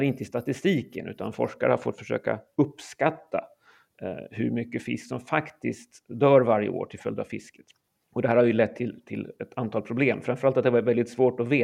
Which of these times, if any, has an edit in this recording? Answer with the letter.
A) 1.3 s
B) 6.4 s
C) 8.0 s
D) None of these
C